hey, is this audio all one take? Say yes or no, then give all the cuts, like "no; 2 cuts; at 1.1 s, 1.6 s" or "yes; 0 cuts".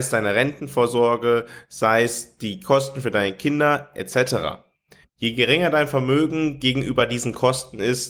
no; 1 cut; at 5.0 s